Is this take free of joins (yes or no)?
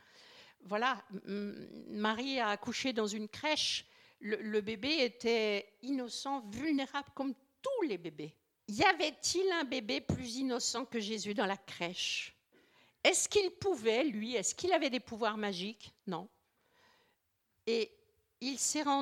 no